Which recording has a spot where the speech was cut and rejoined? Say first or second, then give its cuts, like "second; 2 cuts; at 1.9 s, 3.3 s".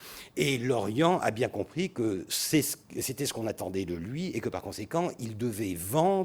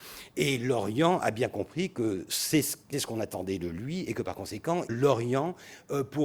second; 2 cuts; at 2.9 s, 4.9 s